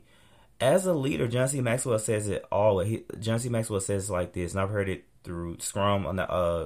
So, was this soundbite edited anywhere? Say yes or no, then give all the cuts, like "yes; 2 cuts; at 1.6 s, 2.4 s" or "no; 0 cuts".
no; 0 cuts